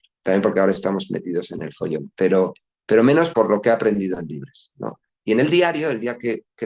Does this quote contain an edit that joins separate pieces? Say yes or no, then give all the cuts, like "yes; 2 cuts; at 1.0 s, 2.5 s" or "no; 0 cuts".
yes; 2 cuts; at 3.3 s, 5.1 s